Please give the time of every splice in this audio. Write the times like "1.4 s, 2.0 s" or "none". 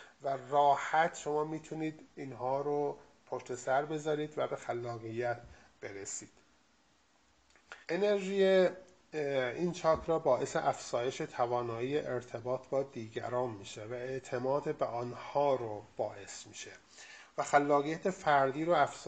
7.8 s